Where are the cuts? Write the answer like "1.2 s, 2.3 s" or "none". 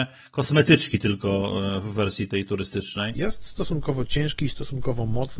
3.1 s